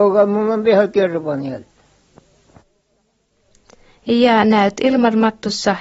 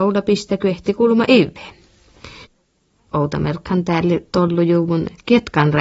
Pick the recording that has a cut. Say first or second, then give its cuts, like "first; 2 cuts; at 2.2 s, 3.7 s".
second; 1 cut; at 3.1 s